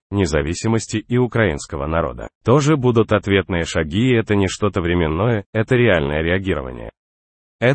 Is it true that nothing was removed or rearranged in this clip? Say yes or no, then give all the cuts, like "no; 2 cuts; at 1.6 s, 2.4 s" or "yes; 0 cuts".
no; 1 cut; at 2.4 s